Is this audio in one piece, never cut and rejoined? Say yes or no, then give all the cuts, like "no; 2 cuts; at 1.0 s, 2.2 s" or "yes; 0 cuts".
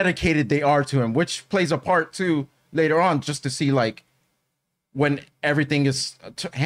yes; 0 cuts